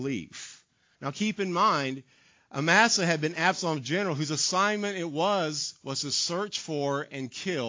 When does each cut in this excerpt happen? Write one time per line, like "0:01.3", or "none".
0:00.9